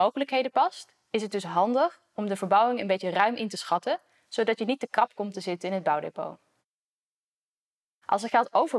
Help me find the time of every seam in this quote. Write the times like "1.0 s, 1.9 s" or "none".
none